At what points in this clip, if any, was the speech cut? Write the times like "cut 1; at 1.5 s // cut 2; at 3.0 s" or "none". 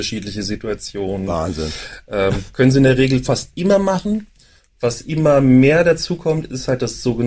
none